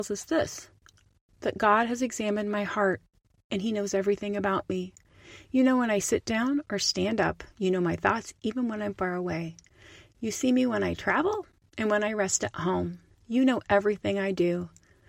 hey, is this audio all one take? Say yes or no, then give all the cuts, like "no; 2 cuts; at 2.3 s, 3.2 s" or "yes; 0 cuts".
yes; 0 cuts